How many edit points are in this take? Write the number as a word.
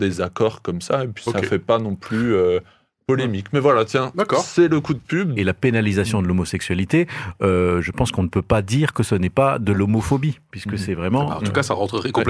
one